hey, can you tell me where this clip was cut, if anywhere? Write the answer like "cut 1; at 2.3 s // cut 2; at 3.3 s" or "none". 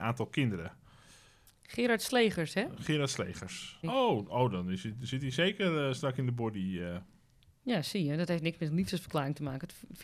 cut 1; at 3.8 s